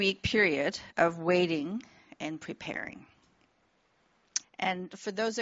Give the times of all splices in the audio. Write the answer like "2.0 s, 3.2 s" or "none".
4.4 s